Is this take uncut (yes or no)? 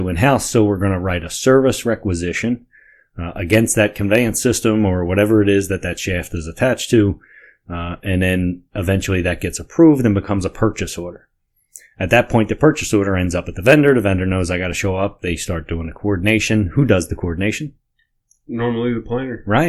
yes